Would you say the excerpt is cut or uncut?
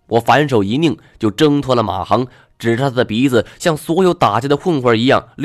uncut